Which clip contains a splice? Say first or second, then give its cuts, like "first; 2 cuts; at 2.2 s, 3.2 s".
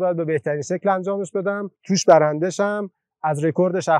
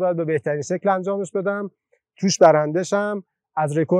first; 1 cut; at 1.8 s